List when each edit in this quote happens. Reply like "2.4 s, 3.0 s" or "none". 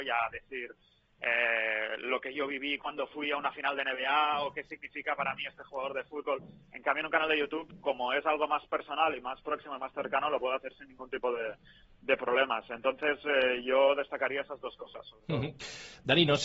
none